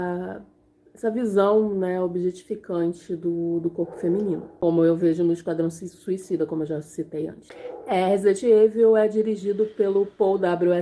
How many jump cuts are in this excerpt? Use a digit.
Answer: 0